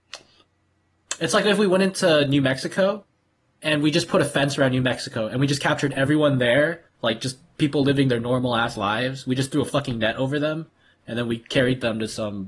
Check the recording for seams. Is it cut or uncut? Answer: uncut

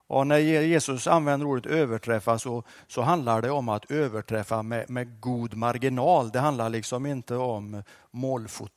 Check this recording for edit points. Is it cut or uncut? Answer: uncut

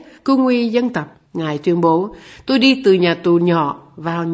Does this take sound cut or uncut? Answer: cut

